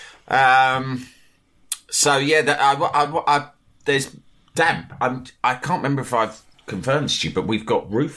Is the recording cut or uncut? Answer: uncut